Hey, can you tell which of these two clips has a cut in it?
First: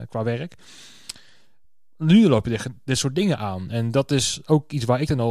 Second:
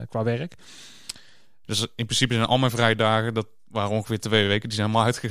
second; 1 cut; at 1.6 s

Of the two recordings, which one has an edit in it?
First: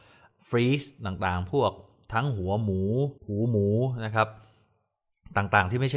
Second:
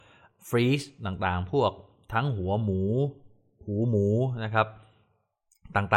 first; 1 cut; at 3.2 s

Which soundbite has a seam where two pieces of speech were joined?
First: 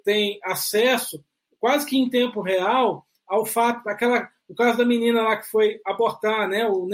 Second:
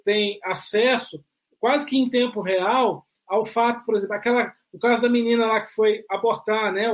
first; 1 cut; at 3.8 s

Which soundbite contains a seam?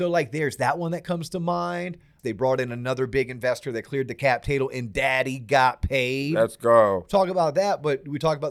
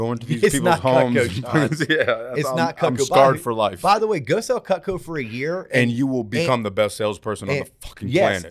first; 1 cut; at 2.2 s

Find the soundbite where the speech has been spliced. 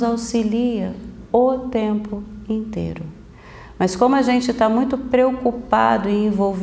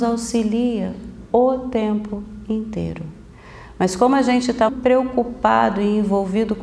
second; 1 cut; at 4.7 s

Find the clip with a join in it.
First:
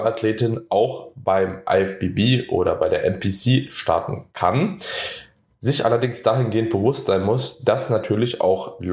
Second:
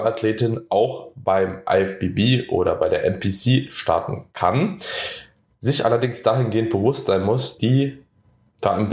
second; 1 cut; at 7.6 s

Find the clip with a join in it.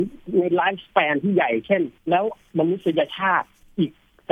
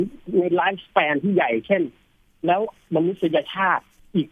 first; 1 cut; at 2.0 s

